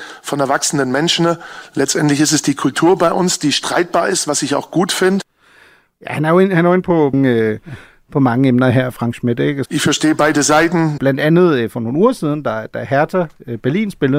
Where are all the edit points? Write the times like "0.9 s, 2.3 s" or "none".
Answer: 7.1 s, 9.7 s, 11.0 s